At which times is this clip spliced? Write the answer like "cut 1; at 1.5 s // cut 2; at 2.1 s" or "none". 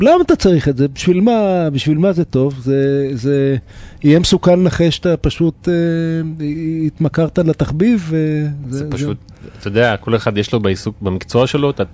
none